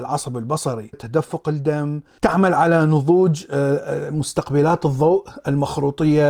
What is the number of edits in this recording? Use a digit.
2